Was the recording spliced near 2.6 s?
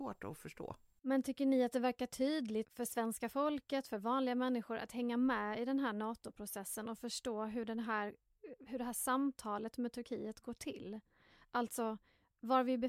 yes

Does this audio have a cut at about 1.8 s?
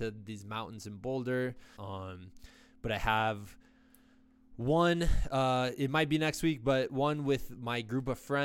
yes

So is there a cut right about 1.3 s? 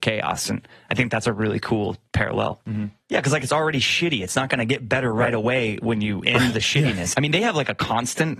no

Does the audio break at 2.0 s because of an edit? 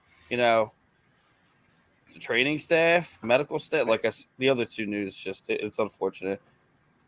no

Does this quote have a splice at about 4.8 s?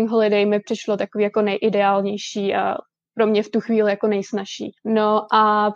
yes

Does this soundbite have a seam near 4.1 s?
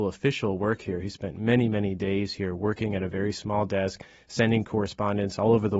no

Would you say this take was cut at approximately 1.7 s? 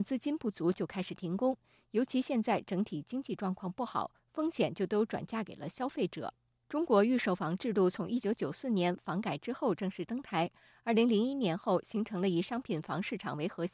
no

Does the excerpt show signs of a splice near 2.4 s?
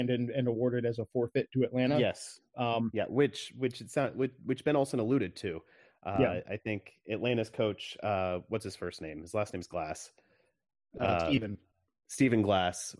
no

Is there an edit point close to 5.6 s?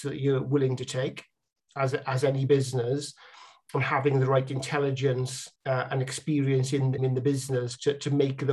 yes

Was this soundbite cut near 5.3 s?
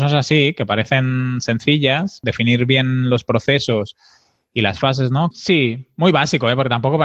yes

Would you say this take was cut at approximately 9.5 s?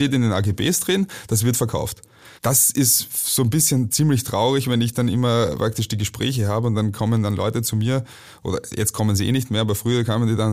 no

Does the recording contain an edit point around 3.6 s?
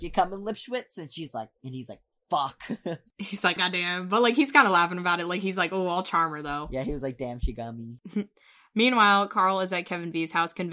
yes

